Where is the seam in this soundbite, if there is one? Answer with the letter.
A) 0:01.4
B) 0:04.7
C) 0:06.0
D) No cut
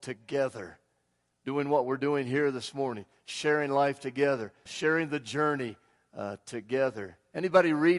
B